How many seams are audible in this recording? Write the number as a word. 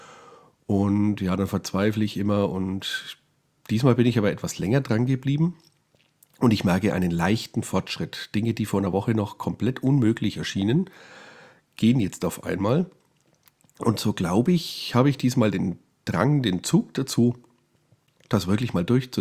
zero